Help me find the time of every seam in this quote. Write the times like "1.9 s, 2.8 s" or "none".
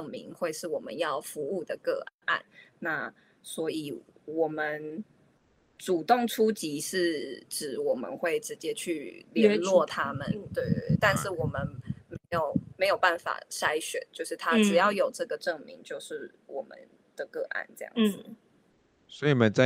none